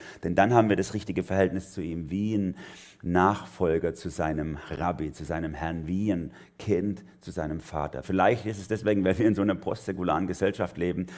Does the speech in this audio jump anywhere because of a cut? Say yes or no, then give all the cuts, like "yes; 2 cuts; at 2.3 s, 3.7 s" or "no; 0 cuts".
yes; 1 cut; at 8.0 s